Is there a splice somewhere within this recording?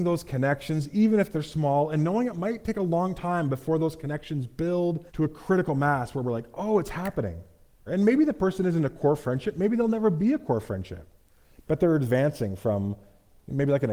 yes; 2 cuts; at 5.1 s, 7.9 s

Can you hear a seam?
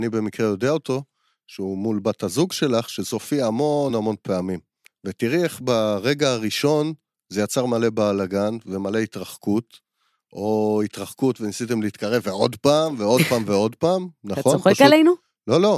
yes; 1 cut; at 3.9 s

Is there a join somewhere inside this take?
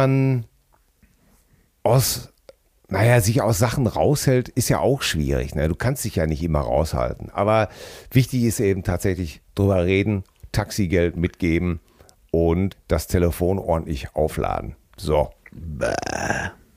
yes; 1 cut; at 12.7 s

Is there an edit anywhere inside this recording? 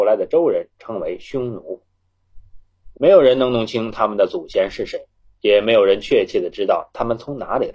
yes; 1 cut; at 2.9 s

